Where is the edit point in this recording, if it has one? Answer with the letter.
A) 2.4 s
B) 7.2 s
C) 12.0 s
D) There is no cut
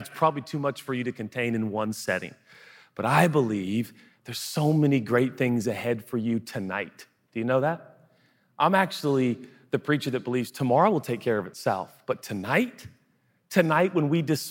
D